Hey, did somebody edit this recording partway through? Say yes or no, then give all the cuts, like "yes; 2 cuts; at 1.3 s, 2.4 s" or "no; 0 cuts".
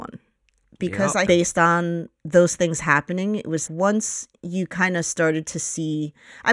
yes; 2 cuts; at 1.3 s, 3.7 s